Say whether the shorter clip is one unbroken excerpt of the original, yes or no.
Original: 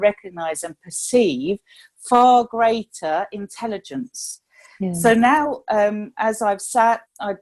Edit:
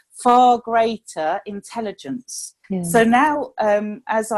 no